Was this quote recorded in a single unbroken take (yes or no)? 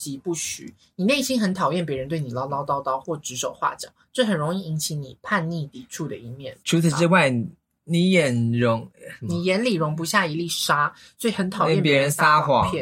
no